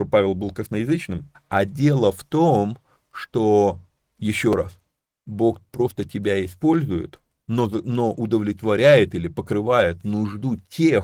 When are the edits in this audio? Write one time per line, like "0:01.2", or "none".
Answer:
0:01.3